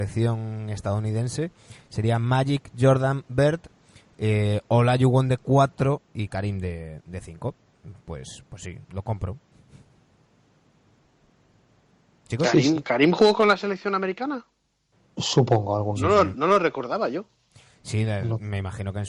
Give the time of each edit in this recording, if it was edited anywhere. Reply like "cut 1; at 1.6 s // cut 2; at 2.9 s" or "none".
none